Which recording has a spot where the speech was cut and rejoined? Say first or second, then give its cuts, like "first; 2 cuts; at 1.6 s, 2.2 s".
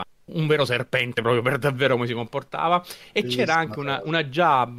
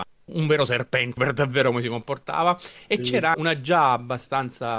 second; 2 cuts; at 1.2 s, 3.3 s